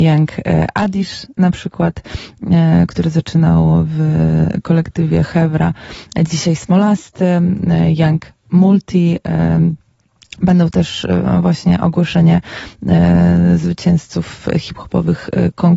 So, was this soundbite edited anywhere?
no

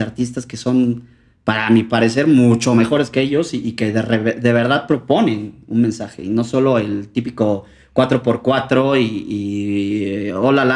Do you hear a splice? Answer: no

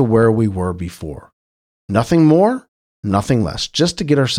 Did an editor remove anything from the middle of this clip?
no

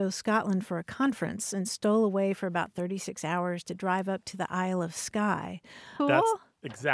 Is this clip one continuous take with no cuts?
no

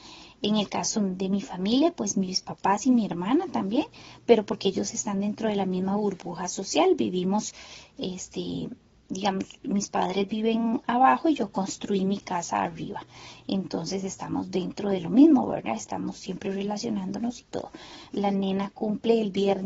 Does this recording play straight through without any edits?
no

